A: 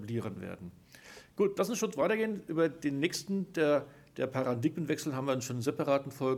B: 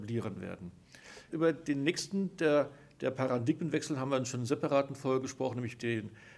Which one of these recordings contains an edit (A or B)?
B